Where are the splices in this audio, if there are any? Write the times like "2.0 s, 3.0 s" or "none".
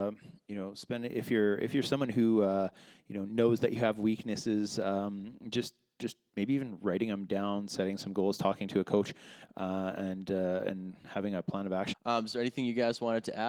11.9 s